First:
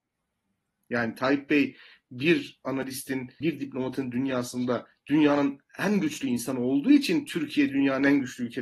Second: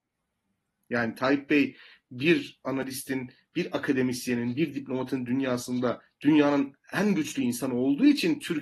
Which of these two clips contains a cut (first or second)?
first